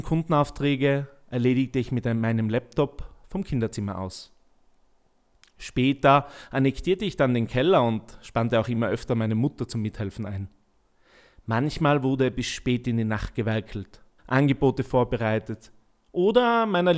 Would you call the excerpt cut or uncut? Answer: cut